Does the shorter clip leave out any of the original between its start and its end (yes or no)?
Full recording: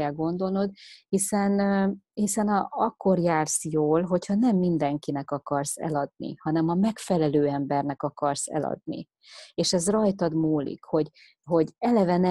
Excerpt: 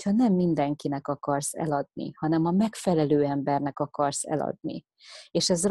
no